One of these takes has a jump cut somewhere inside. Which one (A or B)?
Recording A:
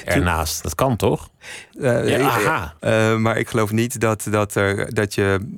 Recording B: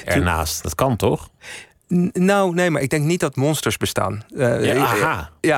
A